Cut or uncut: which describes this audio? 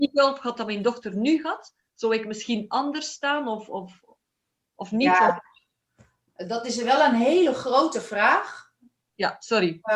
uncut